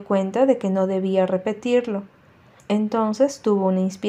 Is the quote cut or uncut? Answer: cut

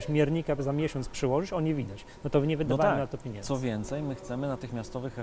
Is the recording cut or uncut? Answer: uncut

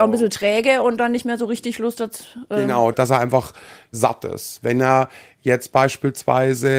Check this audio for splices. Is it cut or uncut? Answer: cut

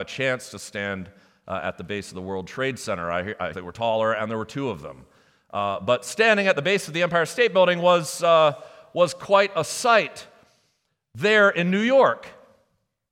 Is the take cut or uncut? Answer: cut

